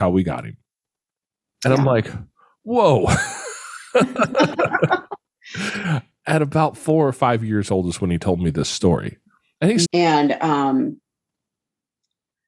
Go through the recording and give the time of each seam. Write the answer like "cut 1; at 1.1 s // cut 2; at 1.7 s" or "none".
cut 1; at 9.9 s